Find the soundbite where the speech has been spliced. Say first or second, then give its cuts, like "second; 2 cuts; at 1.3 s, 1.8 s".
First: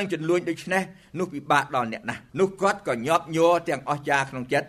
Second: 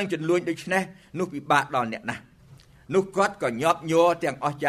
first; 1 cut; at 2.3 s